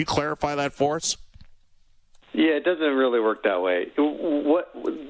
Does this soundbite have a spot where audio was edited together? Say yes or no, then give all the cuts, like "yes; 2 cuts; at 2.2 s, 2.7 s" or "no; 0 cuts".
no; 0 cuts